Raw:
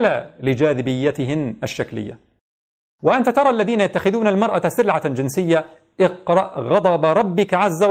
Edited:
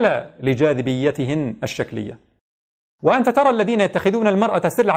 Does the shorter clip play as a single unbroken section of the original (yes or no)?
yes